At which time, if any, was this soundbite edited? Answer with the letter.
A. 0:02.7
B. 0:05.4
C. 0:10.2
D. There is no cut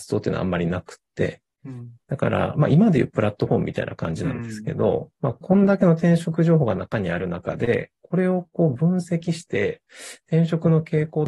B